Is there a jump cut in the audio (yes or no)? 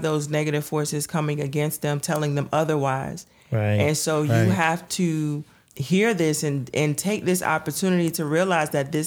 no